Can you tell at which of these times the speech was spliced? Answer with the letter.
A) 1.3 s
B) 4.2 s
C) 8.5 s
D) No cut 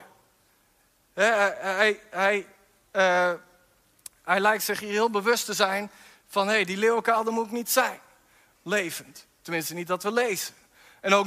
C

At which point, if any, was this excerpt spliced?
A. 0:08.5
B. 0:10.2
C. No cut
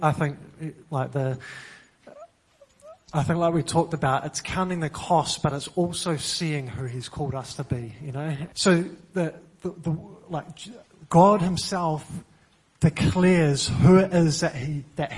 A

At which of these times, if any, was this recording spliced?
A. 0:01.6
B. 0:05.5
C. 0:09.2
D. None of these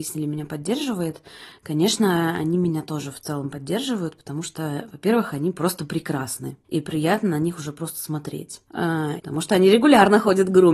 C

